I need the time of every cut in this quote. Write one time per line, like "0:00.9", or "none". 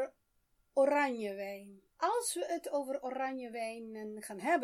0:01.9